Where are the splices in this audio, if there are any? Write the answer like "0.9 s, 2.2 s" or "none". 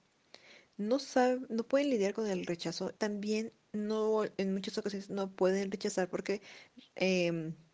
3.0 s